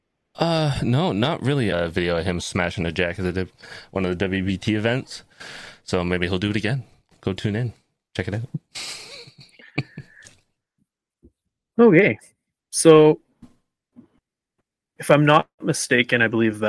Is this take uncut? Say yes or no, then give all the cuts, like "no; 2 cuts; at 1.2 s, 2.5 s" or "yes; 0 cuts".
no; 1 cut; at 1.7 s